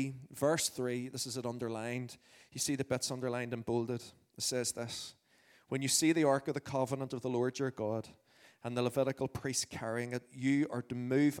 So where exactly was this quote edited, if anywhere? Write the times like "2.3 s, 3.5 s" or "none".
none

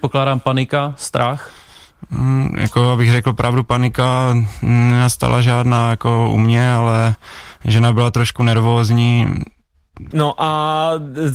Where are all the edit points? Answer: 10.1 s

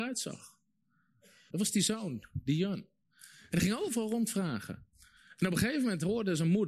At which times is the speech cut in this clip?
1.5 s

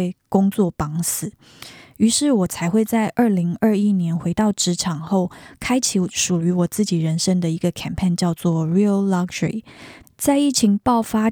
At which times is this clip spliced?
10.0 s

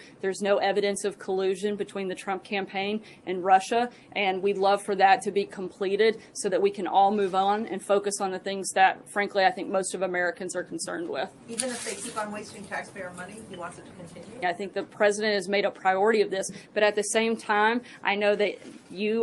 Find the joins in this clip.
14.4 s, 16.6 s

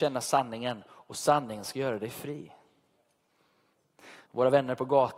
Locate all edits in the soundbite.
4.2 s

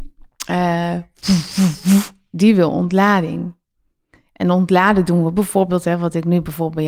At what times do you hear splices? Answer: none

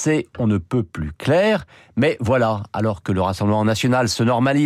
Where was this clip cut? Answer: none

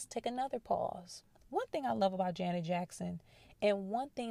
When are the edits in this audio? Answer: none

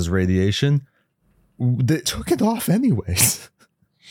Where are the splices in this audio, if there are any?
2.0 s

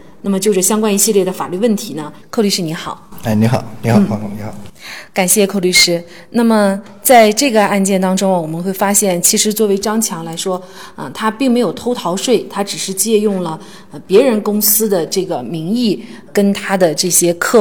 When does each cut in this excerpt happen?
2.2 s

